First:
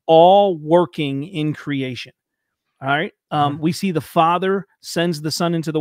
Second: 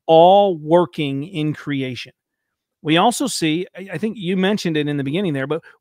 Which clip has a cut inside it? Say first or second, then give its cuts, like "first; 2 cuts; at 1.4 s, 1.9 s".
first; 1 cut; at 2.6 s